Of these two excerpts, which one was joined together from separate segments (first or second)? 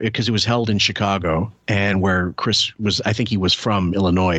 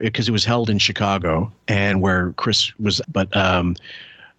second